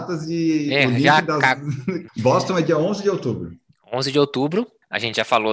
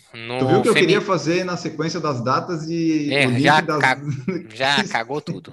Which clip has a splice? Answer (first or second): first